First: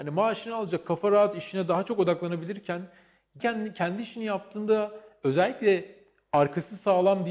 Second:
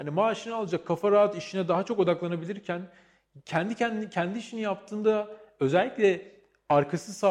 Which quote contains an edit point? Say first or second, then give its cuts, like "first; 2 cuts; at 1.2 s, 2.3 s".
first; 1 cut; at 3.4 s